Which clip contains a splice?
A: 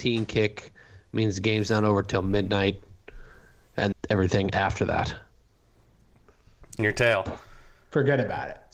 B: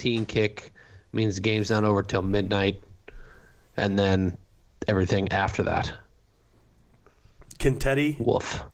A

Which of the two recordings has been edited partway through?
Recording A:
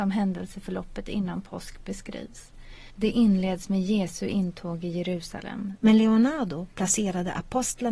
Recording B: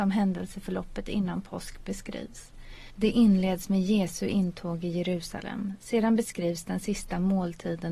A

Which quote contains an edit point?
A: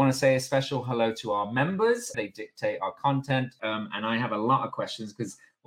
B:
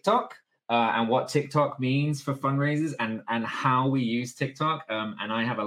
A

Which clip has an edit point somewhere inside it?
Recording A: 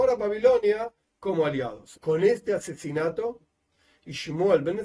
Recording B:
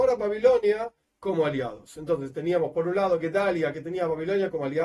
A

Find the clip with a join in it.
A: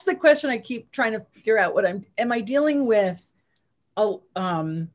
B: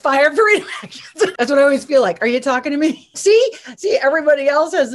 B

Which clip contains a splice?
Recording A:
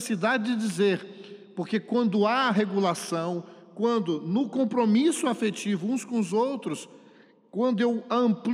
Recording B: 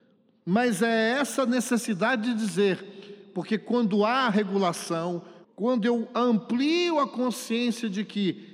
B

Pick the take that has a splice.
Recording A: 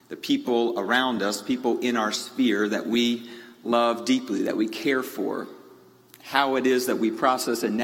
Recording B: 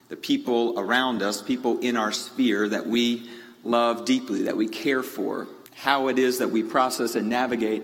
B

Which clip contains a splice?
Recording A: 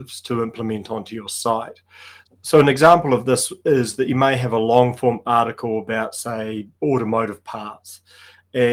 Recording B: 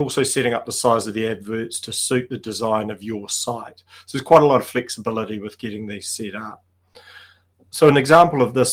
A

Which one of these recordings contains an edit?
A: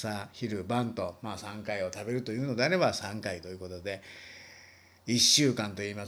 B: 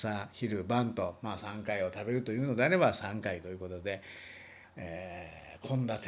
B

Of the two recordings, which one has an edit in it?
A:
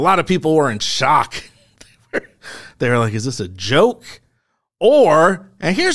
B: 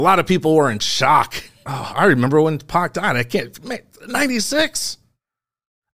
B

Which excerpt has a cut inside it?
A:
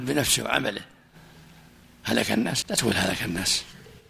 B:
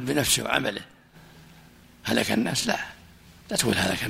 A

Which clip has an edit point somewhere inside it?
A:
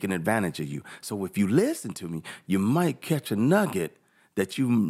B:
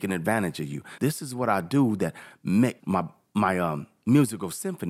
B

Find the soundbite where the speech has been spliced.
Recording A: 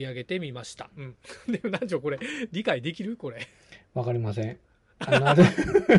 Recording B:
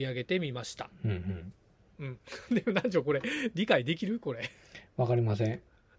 A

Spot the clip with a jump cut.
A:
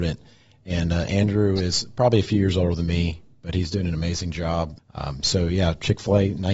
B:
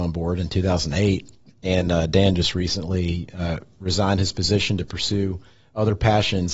A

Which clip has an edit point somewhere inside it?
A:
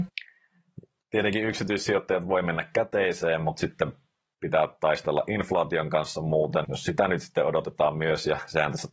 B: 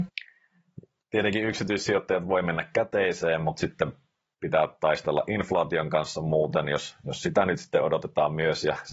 A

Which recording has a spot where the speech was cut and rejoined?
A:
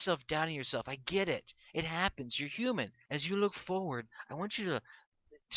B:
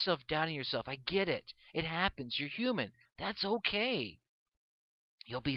A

